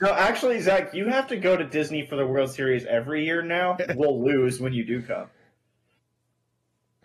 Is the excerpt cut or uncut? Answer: cut